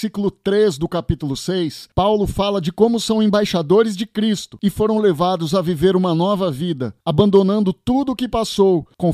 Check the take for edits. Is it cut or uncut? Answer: uncut